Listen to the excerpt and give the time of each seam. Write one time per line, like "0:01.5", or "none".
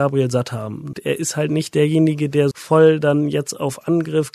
0:00.9
0:02.5